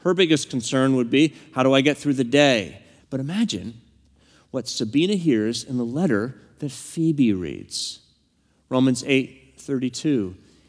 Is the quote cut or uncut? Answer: cut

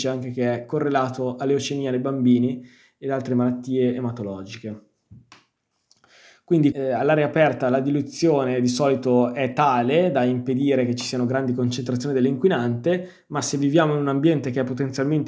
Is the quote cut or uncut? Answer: cut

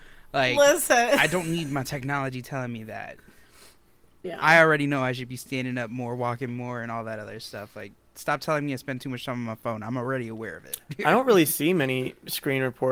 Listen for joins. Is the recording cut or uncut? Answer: uncut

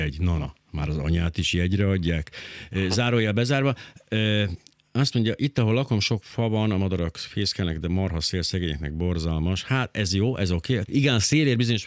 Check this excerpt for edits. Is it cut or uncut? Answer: cut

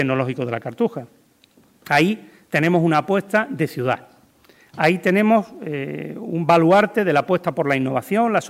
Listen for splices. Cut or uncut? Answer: uncut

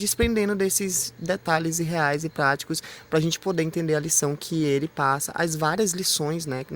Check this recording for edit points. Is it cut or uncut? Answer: uncut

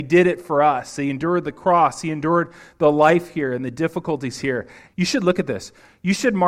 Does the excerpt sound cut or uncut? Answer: cut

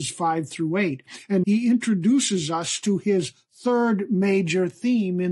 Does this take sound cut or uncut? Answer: cut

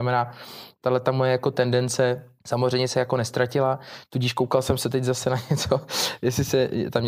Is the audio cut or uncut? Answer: cut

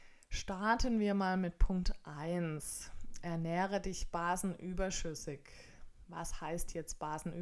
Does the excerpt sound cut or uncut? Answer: uncut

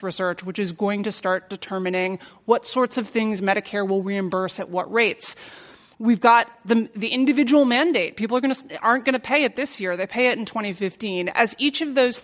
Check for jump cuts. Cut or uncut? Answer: uncut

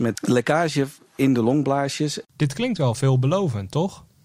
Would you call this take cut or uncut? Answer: cut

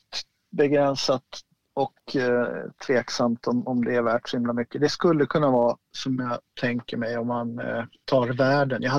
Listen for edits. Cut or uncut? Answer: uncut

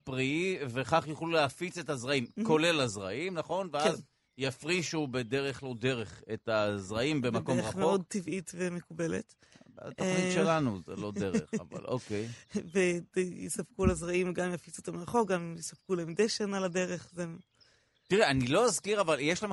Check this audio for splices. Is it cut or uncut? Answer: uncut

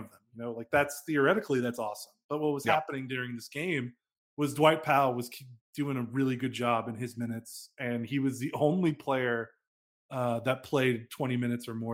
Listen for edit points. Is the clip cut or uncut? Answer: uncut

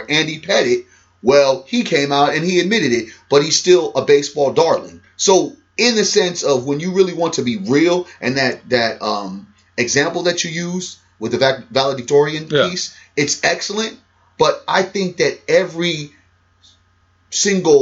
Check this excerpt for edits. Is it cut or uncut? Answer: uncut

